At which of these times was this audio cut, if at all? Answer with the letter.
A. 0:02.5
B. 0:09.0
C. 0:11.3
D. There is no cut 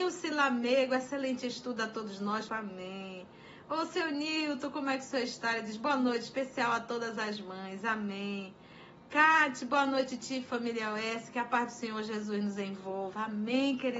A